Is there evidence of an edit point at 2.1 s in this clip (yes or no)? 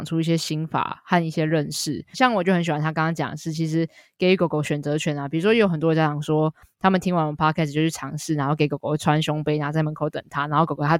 yes